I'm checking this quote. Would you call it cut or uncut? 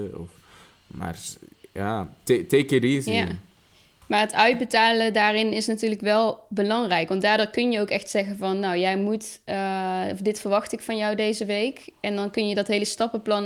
uncut